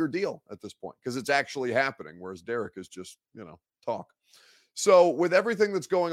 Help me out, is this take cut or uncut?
uncut